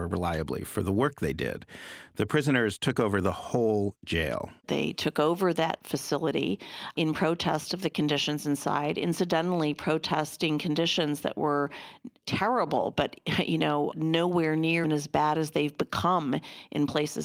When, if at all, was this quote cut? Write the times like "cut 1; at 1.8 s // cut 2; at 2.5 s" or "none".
cut 1; at 4.6 s // cut 2; at 14.8 s